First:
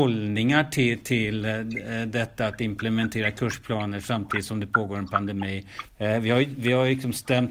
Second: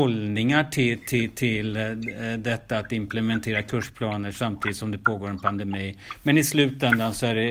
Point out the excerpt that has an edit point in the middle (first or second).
first